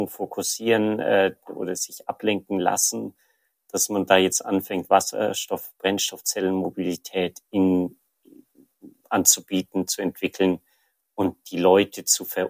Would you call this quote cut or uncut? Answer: uncut